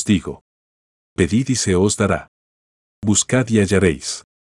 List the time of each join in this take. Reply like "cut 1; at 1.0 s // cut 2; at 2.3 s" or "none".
none